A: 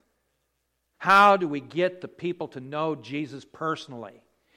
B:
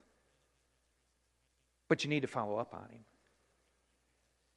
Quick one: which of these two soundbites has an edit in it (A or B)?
A